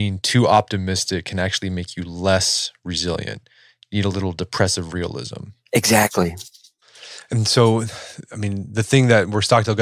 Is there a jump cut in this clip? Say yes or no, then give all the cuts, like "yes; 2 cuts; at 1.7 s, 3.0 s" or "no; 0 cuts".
no; 0 cuts